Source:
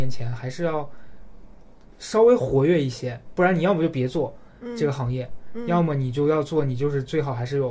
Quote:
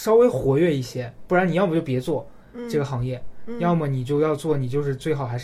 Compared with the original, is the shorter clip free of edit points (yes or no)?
yes